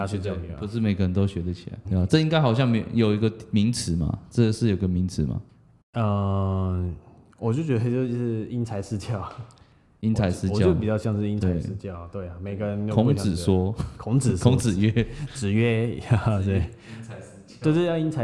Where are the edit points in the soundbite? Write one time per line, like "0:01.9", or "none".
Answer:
0:01.8

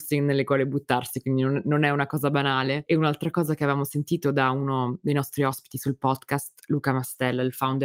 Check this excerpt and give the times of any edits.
none

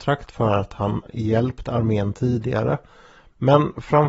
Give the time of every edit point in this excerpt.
none

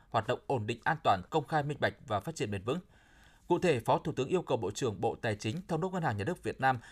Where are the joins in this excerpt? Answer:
0:01.3

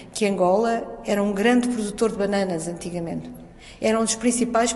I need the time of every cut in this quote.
none

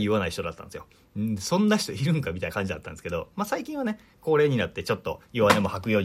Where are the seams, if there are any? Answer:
none

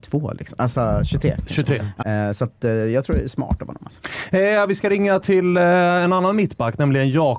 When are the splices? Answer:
0:02.0

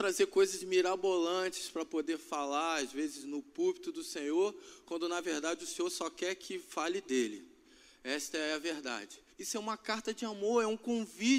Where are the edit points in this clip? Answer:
0:09.3

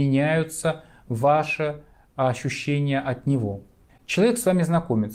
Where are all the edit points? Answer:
0:03.9

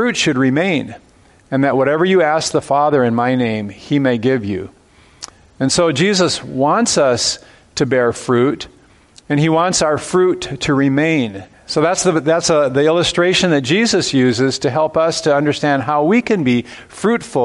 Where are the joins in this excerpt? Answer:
0:11.5

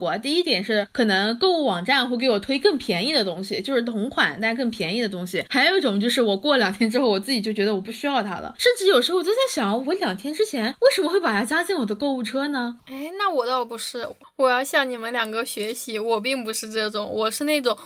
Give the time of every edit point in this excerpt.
0:12.8

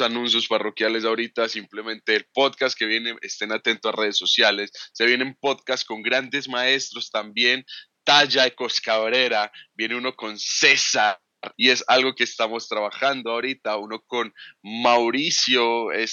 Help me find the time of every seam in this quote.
0:11.5

